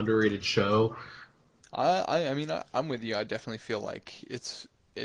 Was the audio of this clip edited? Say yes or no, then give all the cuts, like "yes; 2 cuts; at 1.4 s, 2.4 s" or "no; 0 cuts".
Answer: yes; 1 cut; at 1.6 s